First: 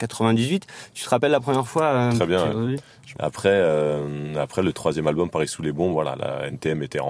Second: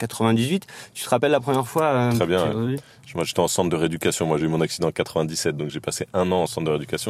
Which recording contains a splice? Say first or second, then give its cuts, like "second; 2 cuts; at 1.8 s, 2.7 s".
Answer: first; 1 cut; at 3.1 s